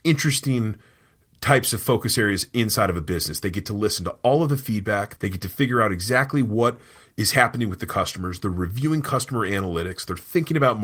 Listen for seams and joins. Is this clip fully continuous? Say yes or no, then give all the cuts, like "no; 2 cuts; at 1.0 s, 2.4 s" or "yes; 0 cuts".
no; 1 cut; at 5.2 s